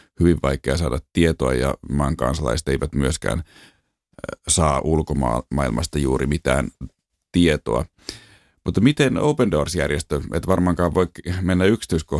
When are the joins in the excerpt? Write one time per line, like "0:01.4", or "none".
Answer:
none